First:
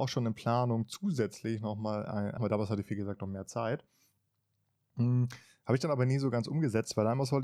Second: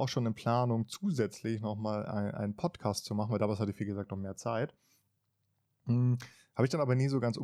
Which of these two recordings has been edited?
first; 1 cut; at 2.4 s

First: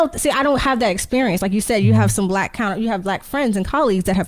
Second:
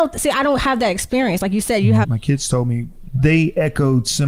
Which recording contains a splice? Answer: second; 1 cut; at 2.0 s

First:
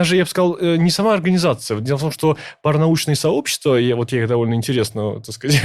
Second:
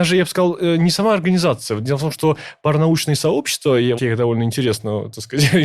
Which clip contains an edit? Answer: second; 1 cut; at 4.0 s

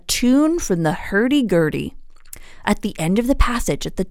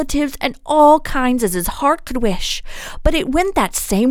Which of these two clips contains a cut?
first; 1 cut; at 2.6 s

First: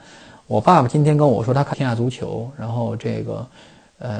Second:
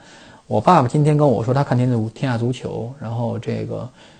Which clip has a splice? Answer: first; 1 cut; at 1.7 s

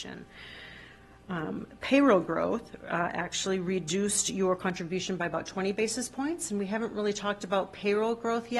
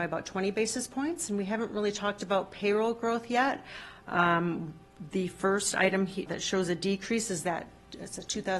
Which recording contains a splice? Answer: second; 2 cuts; at 4.0 s, 6.3 s

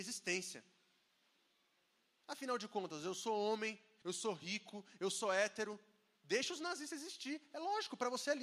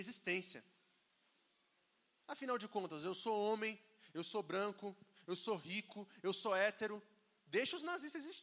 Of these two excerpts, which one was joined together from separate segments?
first; 1 cut; at 4.0 s

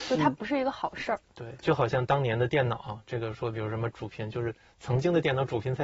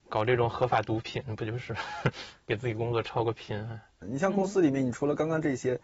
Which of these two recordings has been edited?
first; 1 cut; at 1.6 s

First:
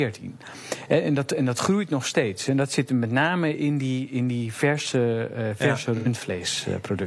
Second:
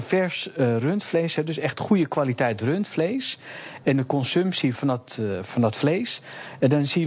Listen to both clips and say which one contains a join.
second; 1 cut; at 4.8 s

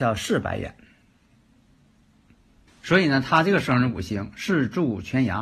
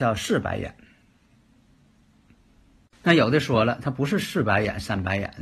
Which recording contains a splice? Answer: first; 1 cut; at 2.7 s

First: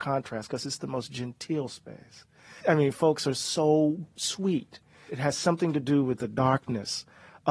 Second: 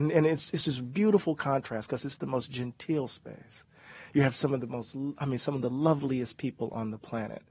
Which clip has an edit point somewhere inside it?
first; 2 cuts; at 2.6 s, 5.1 s

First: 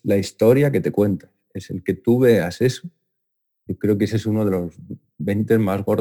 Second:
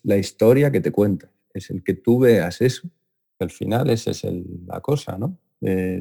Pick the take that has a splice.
second; 1 cut; at 3.3 s

